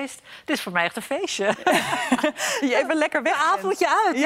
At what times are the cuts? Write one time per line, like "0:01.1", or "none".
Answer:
none